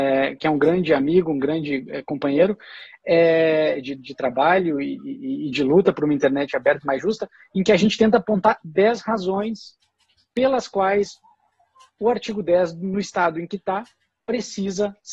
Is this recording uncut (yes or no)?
yes